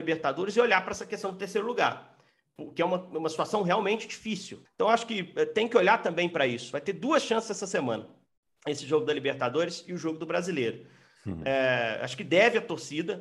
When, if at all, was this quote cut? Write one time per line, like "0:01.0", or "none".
0:04.7